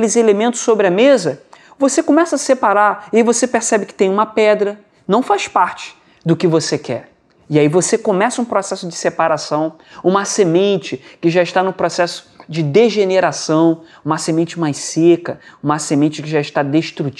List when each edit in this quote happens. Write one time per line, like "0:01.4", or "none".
none